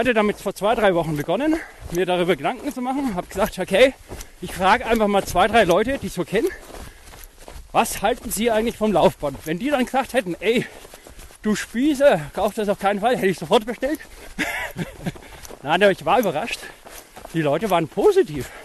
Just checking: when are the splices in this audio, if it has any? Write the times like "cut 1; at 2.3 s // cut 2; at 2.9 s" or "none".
none